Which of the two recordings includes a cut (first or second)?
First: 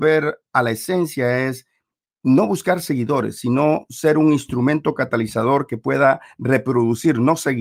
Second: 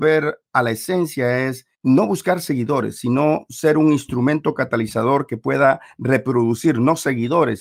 second